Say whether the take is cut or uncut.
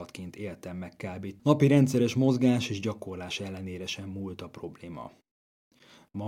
cut